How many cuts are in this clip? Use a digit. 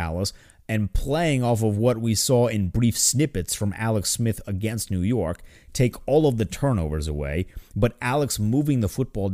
0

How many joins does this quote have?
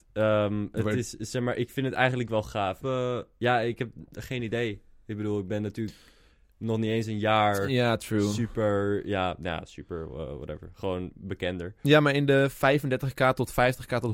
1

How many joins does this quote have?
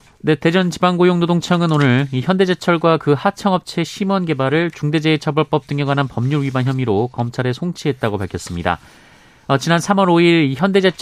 0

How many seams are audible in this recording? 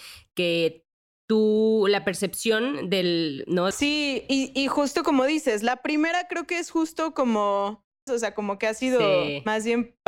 2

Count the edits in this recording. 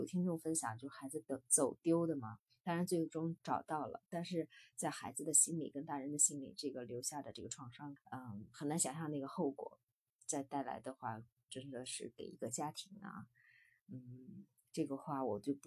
2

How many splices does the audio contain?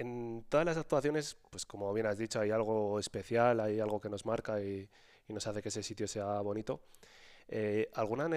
0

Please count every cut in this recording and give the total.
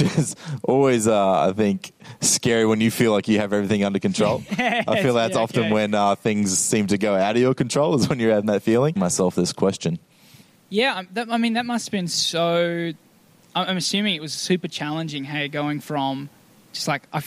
1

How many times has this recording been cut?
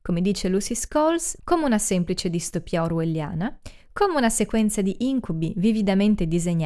1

